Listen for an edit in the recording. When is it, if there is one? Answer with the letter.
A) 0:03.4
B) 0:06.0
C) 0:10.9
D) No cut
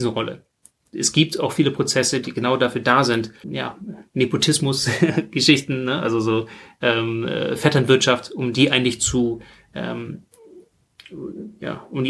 A